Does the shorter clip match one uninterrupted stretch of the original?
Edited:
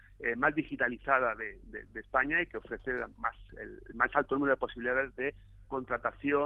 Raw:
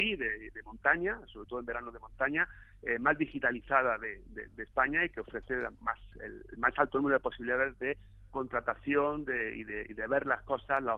yes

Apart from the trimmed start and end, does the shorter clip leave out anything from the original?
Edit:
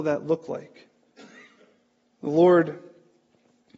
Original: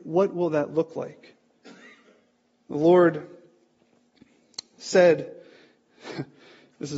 no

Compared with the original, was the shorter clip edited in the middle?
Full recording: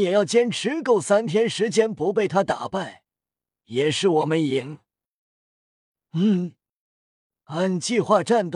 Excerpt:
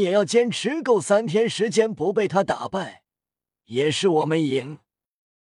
no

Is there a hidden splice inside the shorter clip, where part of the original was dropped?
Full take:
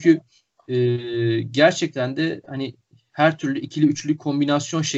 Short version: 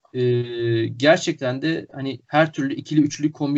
yes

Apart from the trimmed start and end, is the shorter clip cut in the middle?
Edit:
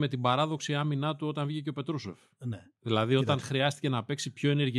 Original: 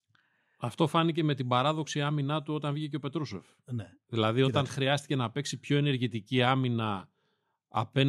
no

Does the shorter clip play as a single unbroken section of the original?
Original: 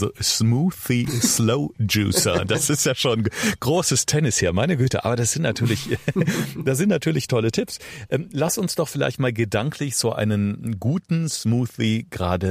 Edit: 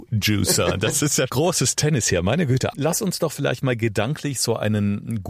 no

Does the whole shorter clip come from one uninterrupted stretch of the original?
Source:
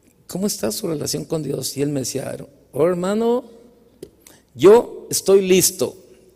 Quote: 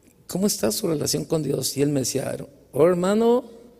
yes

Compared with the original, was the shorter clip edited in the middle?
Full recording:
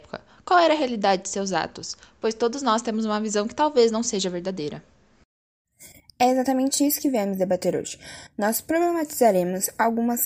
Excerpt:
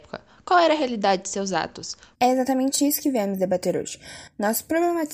yes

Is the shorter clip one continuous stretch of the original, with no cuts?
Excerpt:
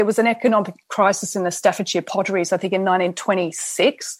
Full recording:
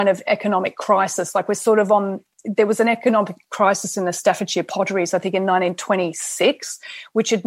yes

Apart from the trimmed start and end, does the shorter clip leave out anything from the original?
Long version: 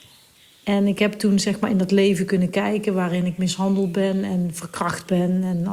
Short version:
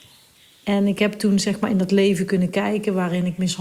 no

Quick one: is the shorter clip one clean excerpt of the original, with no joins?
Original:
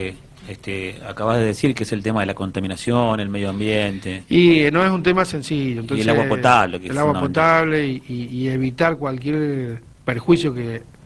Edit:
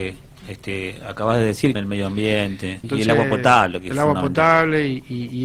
no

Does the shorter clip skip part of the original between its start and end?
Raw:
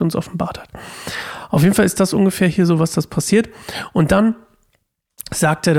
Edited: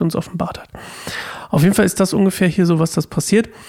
no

